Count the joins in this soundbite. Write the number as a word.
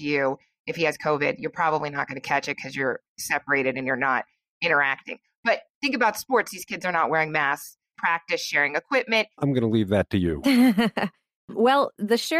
two